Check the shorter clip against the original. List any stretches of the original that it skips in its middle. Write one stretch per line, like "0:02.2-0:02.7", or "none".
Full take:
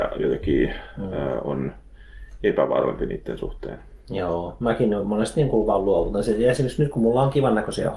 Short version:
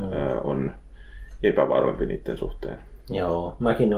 none